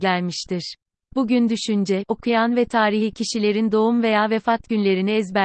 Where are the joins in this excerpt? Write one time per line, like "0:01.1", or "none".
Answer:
0:01.0
0:02.1